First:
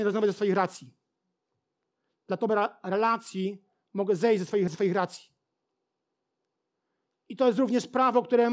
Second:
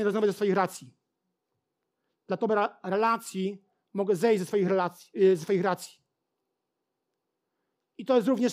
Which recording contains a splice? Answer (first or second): first